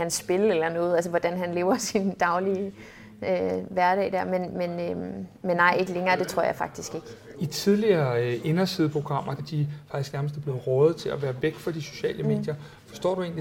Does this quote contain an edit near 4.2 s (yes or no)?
no